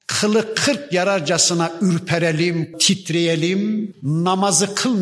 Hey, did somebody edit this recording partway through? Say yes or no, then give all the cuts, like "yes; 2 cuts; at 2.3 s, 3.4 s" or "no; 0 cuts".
yes; 2 cuts; at 2.7 s, 3.9 s